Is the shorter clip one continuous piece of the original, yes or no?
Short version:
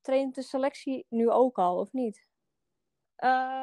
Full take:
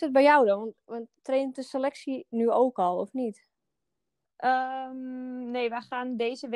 yes